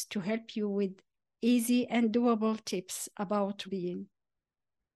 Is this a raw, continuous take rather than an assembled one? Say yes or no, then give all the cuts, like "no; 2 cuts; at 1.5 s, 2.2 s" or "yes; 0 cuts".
no; 1 cut; at 3.6 s